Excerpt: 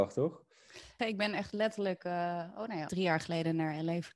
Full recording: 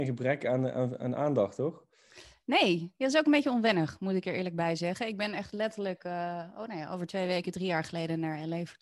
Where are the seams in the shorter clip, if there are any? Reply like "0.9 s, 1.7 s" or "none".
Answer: 1.0 s, 2.9 s